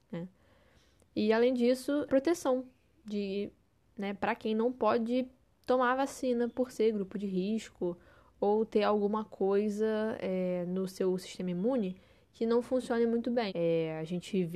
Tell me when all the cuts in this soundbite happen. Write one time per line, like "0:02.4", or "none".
0:02.1
0:13.5